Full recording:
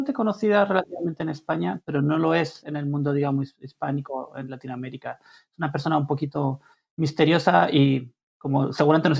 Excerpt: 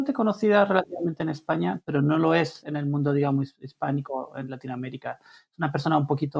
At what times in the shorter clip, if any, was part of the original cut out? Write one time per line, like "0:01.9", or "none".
none